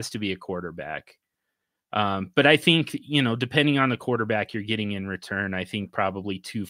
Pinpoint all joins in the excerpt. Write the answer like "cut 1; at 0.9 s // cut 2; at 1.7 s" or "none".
none